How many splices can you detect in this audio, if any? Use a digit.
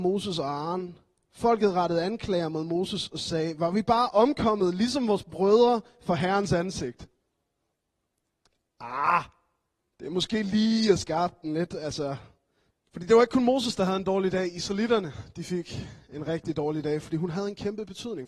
1